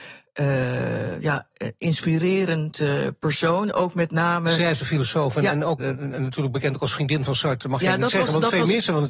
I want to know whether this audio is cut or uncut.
cut